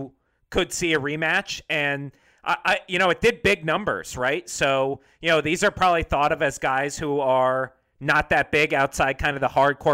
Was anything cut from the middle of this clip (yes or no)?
no